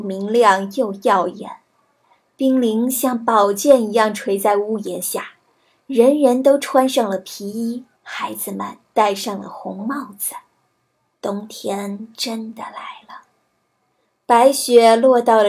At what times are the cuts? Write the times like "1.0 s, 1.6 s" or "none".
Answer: 8.0 s, 11.1 s